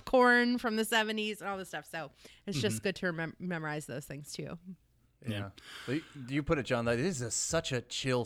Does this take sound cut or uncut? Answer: uncut